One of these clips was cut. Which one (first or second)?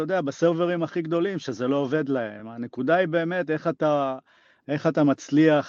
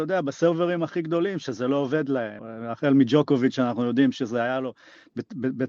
second